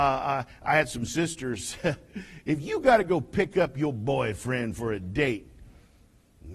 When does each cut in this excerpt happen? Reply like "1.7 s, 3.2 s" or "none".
none